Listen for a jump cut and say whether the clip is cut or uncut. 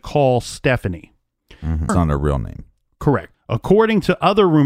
cut